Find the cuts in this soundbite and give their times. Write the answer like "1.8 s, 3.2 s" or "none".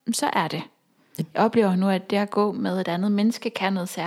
1.2 s